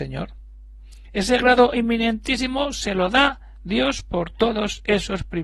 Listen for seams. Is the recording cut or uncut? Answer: uncut